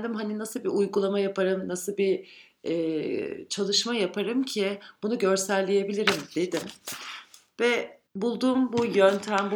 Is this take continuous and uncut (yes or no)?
no